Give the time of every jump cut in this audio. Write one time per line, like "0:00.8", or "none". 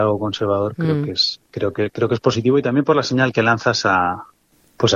none